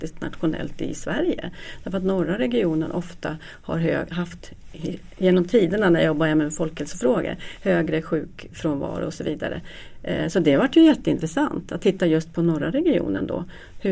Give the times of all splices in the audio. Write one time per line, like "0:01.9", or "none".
none